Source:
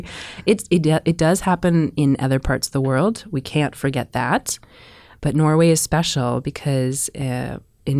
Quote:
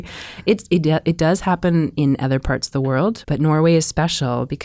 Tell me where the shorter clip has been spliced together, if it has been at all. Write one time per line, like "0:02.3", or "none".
0:03.2